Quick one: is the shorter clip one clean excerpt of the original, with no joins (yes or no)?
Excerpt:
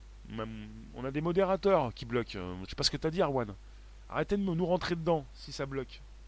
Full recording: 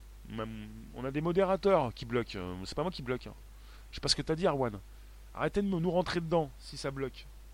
no